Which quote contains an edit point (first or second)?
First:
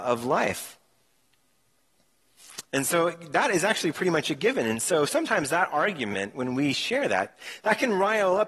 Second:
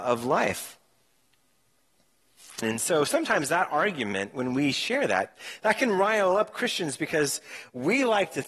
second